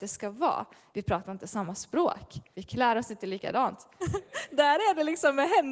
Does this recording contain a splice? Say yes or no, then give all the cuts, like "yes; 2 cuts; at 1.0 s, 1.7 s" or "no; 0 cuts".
yes; 3 cuts; at 0.9 s, 2.5 s, 4.0 s